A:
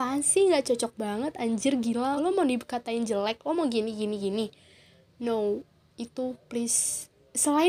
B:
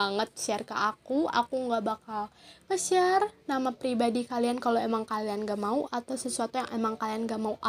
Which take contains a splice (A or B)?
A